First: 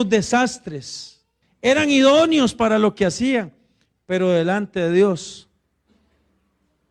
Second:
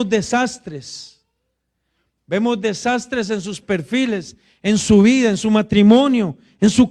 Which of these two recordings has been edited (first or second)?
first